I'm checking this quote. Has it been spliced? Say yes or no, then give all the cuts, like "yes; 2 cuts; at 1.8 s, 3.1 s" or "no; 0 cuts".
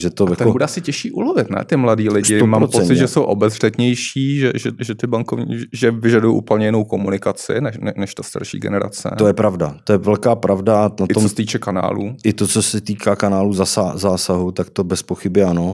no; 0 cuts